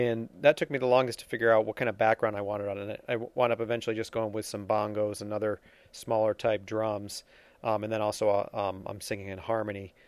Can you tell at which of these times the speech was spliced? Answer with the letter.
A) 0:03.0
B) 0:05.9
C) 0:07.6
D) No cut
D